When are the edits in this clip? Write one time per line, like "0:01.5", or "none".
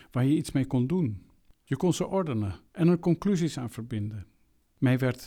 0:01.5

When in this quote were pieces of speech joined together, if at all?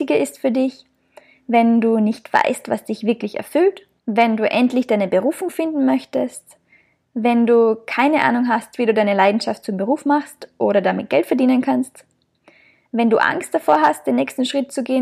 0:04.0

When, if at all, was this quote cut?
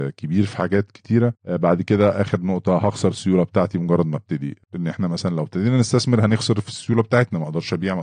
0:01.4
0:04.6

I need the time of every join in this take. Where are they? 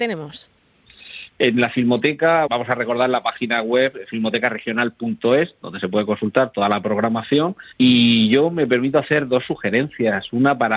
0:02.5
0:07.7

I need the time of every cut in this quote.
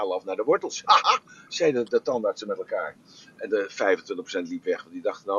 0:01.0

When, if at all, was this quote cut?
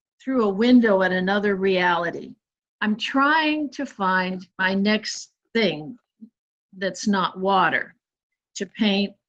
0:02.6
0:04.5

